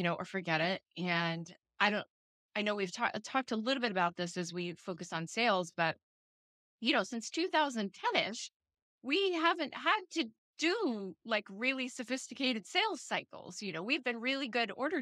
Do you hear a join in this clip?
no; 0 cuts

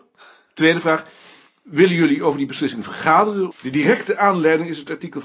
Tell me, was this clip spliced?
yes; 1 cut; at 3.5 s

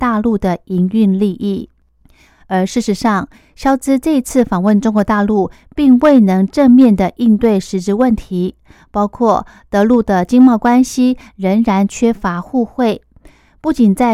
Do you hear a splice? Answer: no; 0 cuts

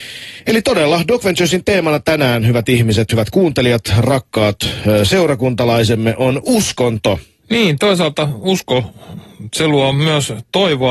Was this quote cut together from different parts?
yes; 1 cut; at 7.4 s

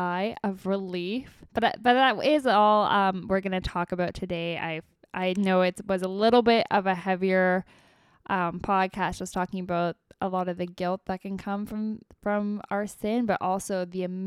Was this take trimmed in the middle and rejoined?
yes; 1 cut; at 1.5 s

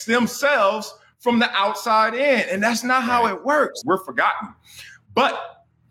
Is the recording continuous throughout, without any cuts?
no; 1 cut; at 3.8 s

